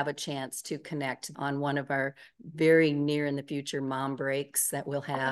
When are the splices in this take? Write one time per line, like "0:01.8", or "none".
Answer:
0:01.3